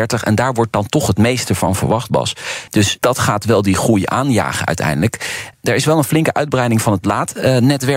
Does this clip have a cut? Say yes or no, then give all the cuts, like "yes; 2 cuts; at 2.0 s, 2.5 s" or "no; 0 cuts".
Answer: yes; 1 cut; at 2.7 s